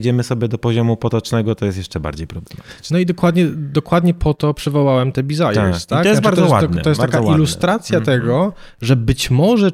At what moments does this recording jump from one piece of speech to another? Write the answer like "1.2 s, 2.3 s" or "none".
none